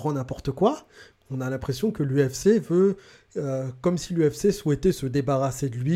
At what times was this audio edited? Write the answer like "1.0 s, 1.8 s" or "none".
1.1 s

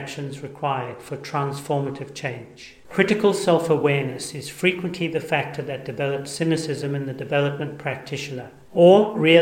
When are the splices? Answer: none

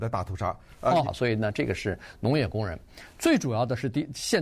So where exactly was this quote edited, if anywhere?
1.0 s

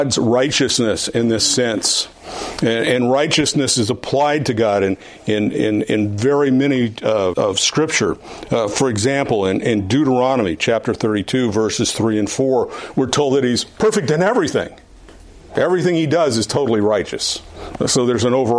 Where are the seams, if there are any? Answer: 7.3 s

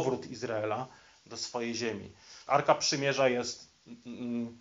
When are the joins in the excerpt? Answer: 2.5 s

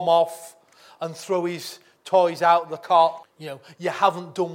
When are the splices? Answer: 3.2 s

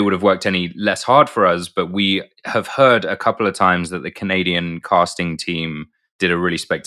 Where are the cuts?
none

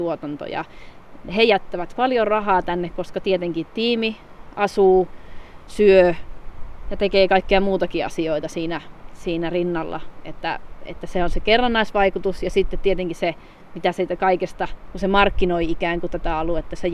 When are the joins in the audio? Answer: none

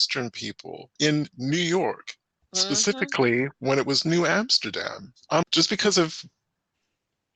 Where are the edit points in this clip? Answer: 1.0 s, 5.4 s

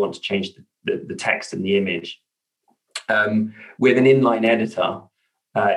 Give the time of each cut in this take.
none

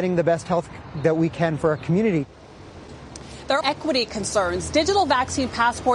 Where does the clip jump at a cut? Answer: 3.6 s

